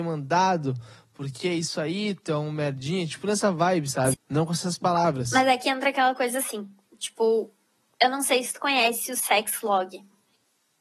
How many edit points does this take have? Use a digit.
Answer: 1